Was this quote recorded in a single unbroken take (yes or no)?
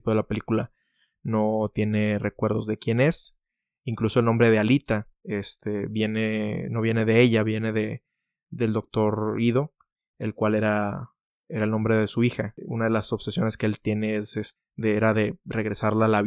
yes